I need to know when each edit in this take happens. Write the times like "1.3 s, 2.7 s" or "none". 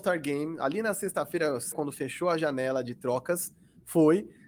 1.7 s